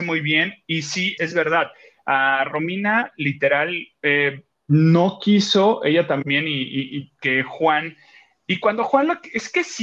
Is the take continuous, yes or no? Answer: no